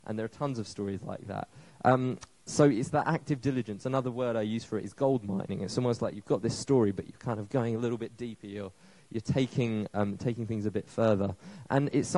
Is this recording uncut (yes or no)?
yes